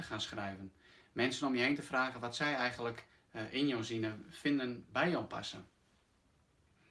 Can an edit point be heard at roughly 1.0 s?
no; 0 cuts

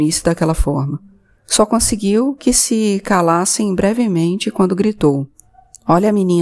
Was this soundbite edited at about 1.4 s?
yes; 1 cut; at 1.4 s

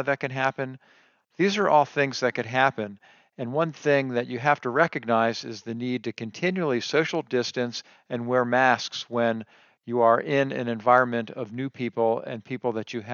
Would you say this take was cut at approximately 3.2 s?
no; 1 cut; at 1.2 s

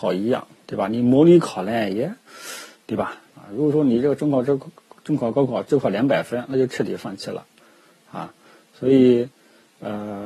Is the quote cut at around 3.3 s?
yes; 1 cut; at 3.3 s

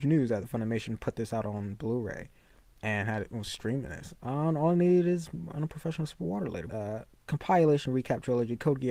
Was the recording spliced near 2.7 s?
no; 2 cuts; at 4.1 s, 6.7 s

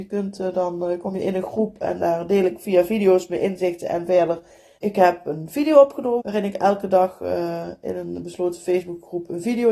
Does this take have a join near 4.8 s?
yes; 2 cuts; at 4.8 s, 6.2 s

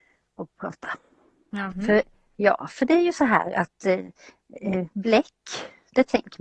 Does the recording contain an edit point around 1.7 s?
yes; 1 cut; at 1.7 s

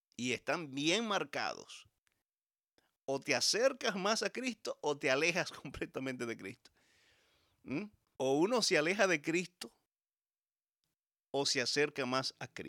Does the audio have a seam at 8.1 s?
yes; 1 cut; at 8.1 s

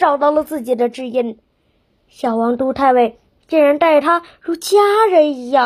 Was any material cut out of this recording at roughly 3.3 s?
no; 0 cuts

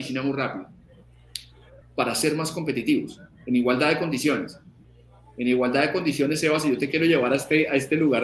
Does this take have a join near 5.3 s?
no; 1 cut; at 1.8 s

